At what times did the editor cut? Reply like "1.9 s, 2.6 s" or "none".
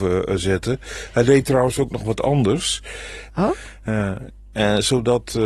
3.3 s